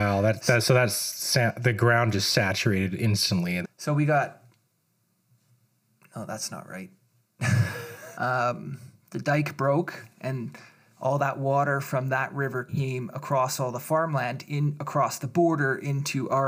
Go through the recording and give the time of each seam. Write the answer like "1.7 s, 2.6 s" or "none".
3.6 s, 8.1 s